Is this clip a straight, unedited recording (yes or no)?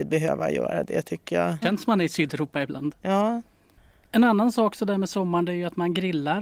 no